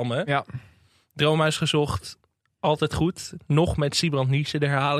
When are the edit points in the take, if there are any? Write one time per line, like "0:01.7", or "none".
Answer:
none